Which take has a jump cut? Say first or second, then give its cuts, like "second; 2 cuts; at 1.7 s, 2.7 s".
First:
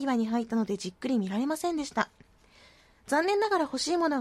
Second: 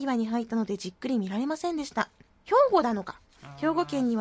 second; 1 cut; at 2.3 s